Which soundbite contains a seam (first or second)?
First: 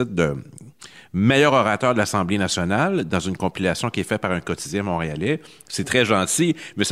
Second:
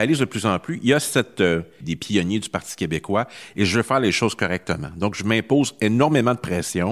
second